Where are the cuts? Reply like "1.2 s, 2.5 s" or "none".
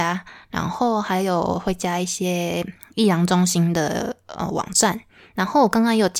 none

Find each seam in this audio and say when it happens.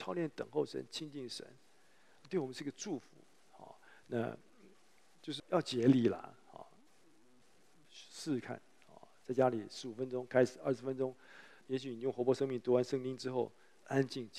5.4 s, 11.6 s

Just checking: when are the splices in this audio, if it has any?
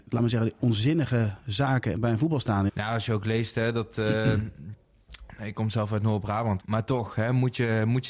2.7 s, 6.6 s

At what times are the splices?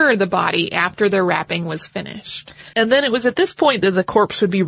2.7 s

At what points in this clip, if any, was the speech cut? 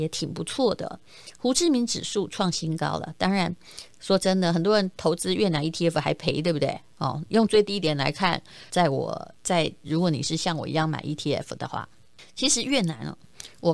8.7 s, 9.8 s

